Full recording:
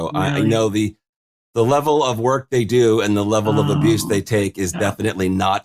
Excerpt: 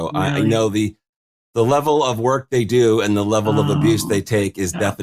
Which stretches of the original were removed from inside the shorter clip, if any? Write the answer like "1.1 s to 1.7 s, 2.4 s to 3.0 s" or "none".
none